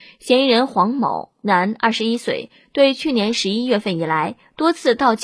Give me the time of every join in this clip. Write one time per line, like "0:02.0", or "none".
none